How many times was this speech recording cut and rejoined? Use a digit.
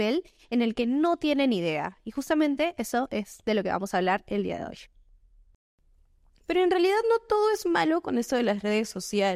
0